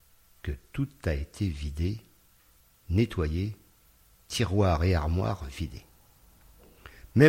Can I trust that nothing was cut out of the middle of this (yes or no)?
yes